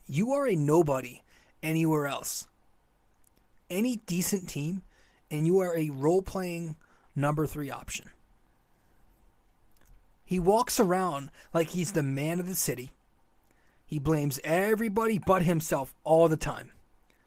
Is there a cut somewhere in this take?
no; 0 cuts

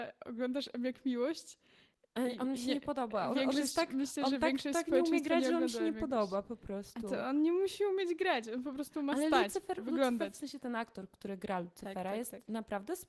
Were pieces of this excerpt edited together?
no; 0 cuts

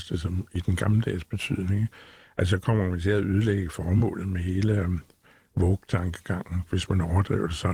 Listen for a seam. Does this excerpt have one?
no; 0 cuts

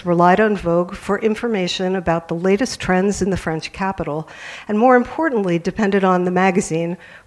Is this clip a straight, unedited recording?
yes; 0 cuts

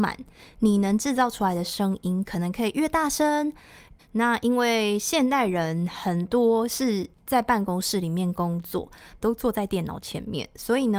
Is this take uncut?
no; 2 cuts; at 4.0 s, 9.2 s

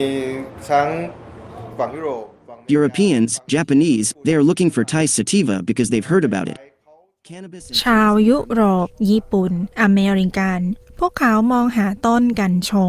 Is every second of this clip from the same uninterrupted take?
no; 1 cut; at 4.1 s

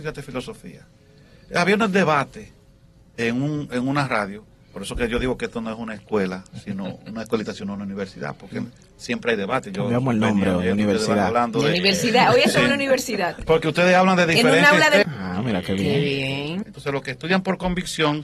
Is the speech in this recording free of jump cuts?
no; 2 cuts; at 15.0 s, 16.6 s

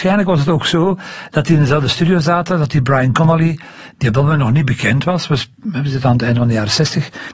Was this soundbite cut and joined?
no; 0 cuts

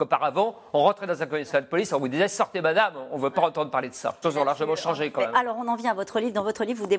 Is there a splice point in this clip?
yes; 1 cut; at 4.2 s

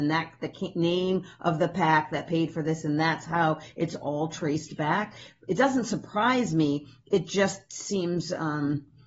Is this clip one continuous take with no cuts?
yes; 0 cuts

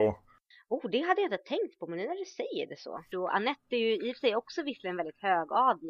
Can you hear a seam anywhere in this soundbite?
yes; 1 cut; at 3.1 s

